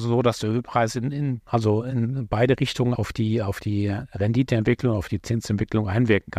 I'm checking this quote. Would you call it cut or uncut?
cut